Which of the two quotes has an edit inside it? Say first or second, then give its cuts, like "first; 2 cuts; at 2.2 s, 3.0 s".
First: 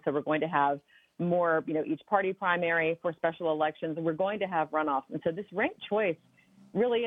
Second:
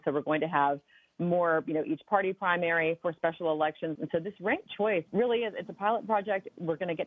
second; 2 cuts; at 4.0 s, 5.1 s